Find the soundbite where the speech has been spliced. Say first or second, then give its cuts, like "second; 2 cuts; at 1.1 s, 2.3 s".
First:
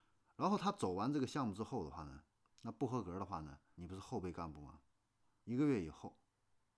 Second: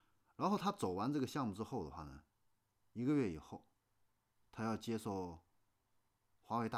first; 3 cuts; at 2.4 s, 3.7 s, 5.4 s